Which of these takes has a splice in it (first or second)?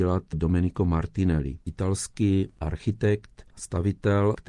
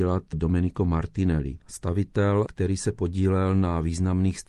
second